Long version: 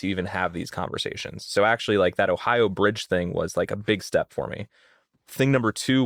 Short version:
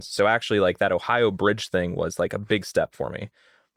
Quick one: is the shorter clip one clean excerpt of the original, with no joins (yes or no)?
yes